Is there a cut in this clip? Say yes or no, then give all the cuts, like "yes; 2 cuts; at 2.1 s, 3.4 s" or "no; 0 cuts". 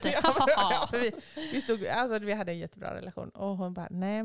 no; 0 cuts